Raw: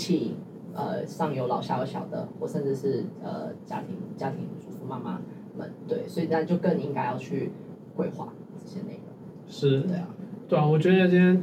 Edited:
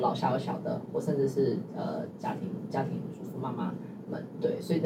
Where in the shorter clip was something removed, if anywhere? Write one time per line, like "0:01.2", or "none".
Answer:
none